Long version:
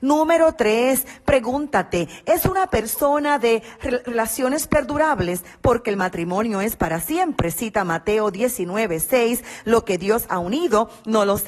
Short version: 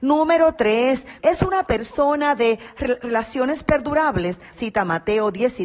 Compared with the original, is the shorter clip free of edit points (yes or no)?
no